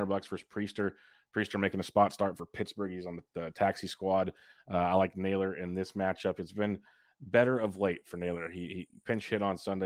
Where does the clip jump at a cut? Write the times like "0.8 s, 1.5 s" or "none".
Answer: none